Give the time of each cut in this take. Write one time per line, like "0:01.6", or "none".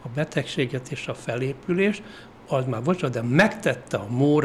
none